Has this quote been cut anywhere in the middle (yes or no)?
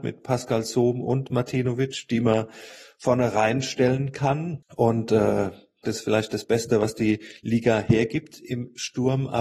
yes